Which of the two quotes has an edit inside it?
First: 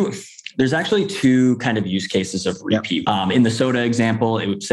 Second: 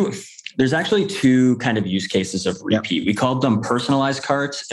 first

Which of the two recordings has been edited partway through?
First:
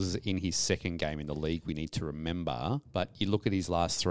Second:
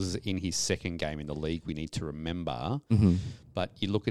first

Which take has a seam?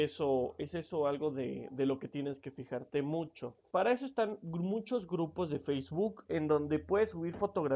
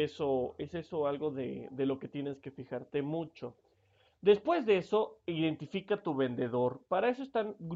first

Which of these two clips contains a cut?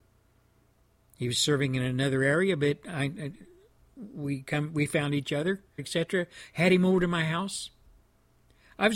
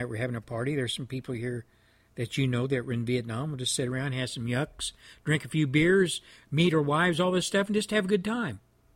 first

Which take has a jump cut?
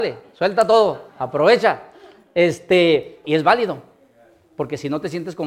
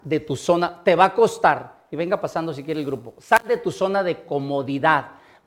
first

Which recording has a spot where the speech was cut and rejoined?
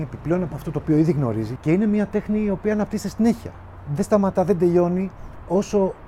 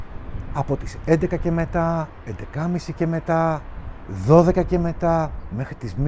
first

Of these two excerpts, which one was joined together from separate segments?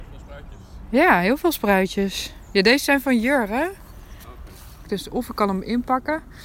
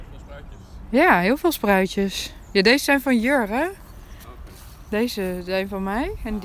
first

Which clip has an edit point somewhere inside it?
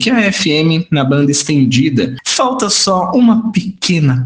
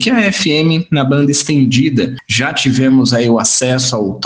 first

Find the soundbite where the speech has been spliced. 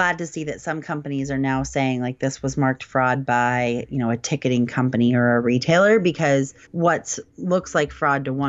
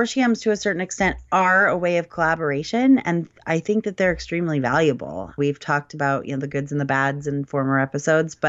first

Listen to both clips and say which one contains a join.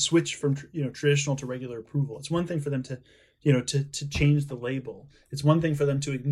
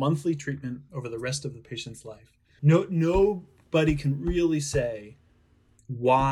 second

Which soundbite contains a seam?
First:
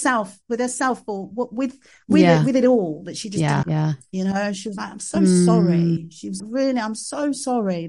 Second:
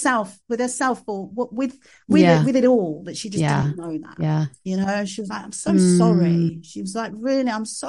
first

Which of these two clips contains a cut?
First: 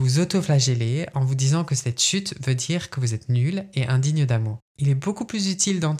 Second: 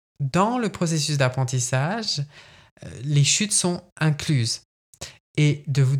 first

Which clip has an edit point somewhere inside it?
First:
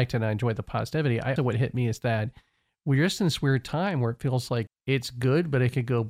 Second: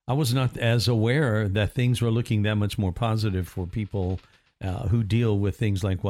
first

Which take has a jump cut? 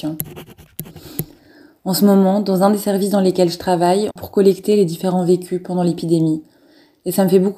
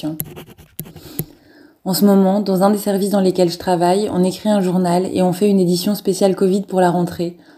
first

